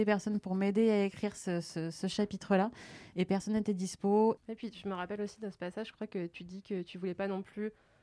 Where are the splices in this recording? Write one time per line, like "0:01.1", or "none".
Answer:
0:04.4